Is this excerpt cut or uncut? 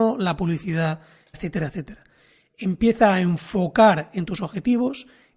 cut